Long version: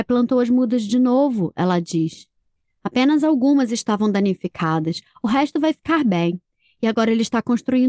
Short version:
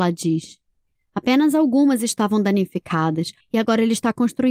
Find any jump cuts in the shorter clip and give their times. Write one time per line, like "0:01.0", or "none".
0:03.4